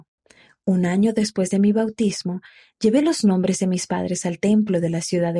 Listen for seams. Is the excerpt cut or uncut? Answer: uncut